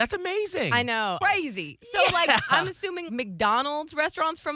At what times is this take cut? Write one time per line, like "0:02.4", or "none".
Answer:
0:01.2
0:03.1